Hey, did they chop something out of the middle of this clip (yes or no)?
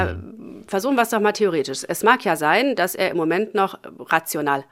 no